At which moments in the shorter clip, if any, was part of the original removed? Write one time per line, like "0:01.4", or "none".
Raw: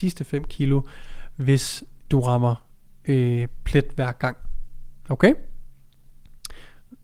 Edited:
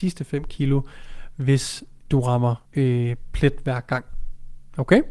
0:02.7